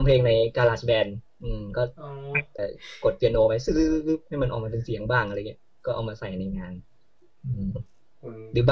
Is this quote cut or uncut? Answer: cut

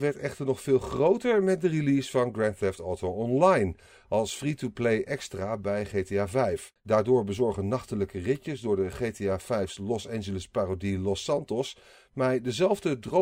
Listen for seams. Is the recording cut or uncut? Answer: cut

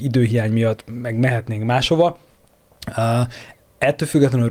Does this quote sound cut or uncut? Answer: uncut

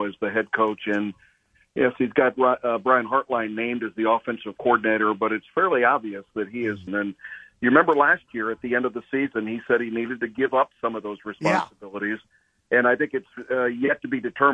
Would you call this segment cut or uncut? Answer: cut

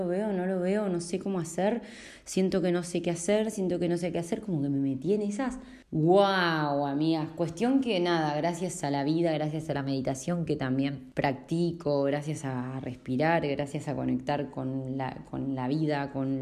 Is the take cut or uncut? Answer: uncut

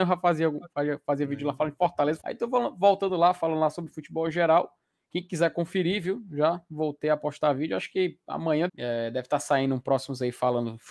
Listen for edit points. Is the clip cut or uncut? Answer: cut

